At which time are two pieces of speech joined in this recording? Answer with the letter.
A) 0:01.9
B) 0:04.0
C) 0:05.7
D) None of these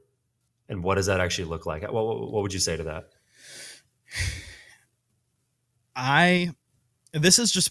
D